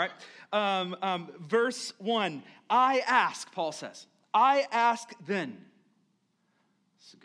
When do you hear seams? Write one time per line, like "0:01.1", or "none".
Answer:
none